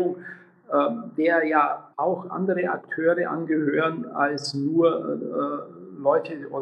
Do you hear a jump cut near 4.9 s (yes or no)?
no